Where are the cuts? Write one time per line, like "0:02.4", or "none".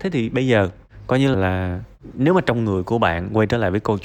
0:01.3